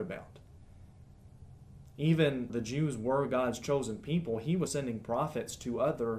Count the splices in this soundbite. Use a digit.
2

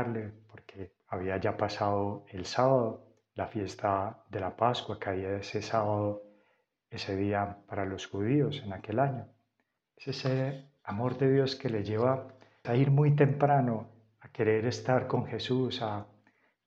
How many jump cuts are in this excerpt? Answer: 2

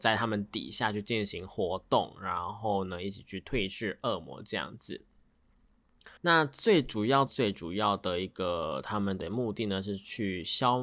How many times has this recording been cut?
2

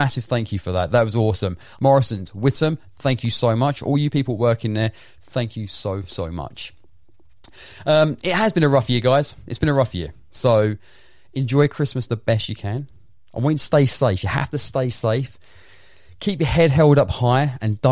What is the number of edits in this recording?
0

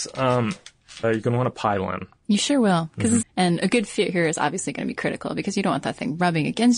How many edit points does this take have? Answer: 2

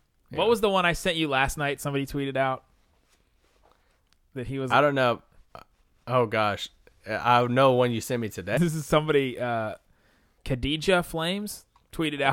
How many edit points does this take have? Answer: 2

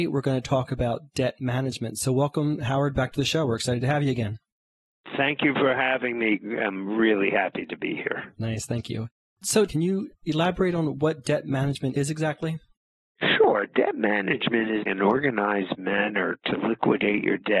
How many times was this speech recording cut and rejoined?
2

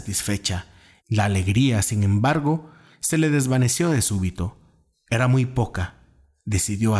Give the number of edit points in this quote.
1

